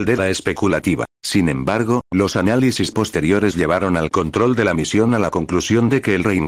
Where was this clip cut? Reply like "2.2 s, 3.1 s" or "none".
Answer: 1.1 s